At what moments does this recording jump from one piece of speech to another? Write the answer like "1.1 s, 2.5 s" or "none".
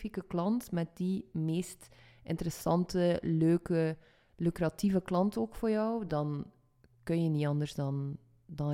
none